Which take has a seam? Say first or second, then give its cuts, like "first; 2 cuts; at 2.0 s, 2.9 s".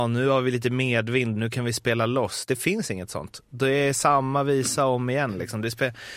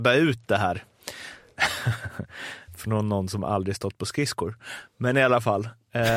first; 1 cut; at 1.4 s